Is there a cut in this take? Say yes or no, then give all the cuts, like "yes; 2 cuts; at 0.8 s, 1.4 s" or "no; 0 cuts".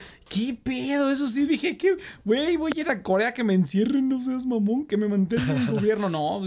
no; 0 cuts